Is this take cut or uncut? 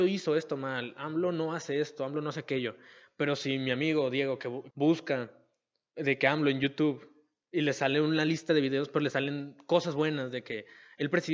cut